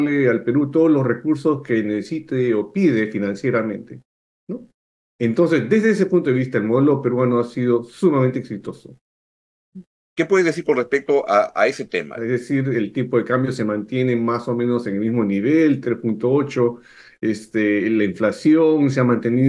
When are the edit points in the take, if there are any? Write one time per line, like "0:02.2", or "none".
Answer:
0:10.1
0:12.2
0:15.8